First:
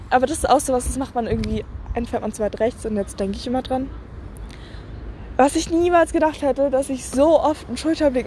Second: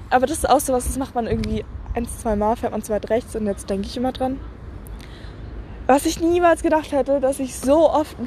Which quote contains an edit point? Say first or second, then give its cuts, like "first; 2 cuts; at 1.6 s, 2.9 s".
first; 1 cut; at 2.1 s